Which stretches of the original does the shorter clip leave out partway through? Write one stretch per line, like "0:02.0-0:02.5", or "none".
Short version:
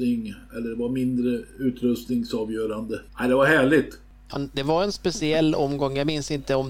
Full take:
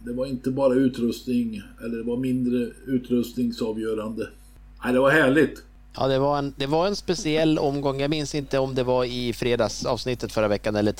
0:04.4-0:04.7
0:06.0-0:06.4